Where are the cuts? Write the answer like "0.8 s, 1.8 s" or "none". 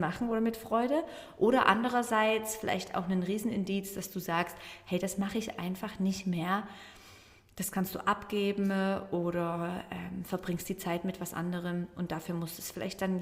none